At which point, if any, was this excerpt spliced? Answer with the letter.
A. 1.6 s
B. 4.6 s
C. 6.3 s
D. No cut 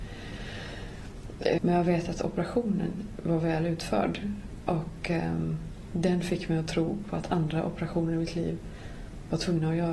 A